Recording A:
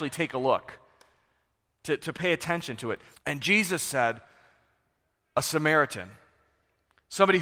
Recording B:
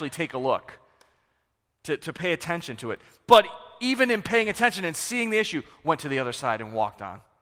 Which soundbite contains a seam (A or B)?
A